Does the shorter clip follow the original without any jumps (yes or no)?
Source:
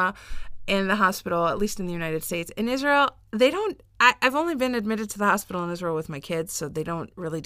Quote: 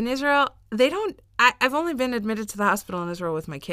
yes